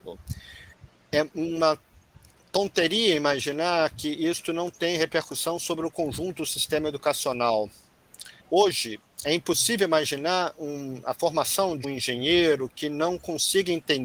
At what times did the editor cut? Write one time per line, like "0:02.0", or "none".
0:08.4
0:11.8

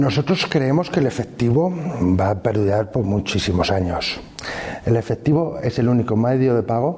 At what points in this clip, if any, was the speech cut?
0:02.0
0:04.8

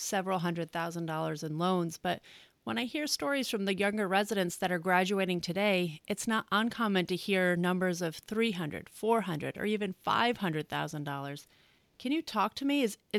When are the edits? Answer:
none

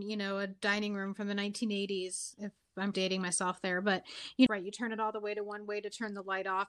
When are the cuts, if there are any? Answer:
0:02.9
0:04.5

